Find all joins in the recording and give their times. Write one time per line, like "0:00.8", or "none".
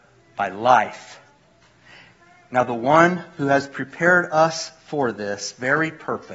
none